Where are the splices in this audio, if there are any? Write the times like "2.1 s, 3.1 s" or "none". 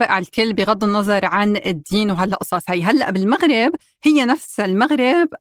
none